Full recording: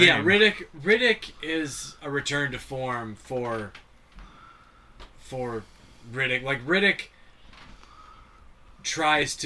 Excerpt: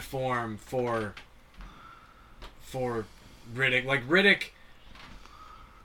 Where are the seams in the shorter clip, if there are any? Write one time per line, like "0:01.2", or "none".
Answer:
none